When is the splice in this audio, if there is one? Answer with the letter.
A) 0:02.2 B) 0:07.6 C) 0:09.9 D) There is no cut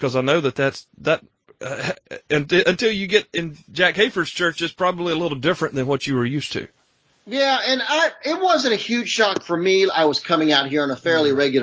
C